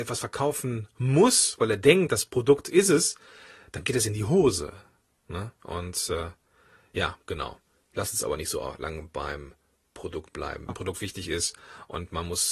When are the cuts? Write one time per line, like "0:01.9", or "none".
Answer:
0:10.7